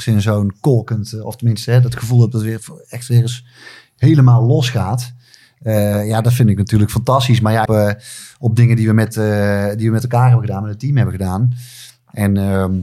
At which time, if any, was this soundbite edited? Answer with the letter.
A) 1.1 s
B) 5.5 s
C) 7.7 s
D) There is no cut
C